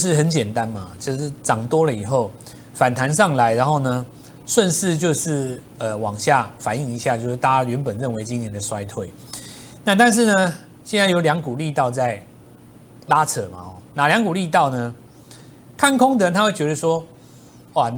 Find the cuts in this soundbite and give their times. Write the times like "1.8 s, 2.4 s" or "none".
none